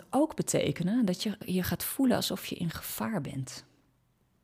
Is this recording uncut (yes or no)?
yes